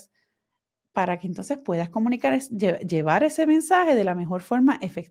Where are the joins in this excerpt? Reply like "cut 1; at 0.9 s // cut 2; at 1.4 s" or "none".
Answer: none